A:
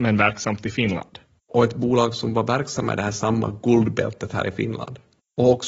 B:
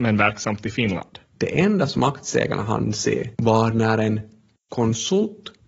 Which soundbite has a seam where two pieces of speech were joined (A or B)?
B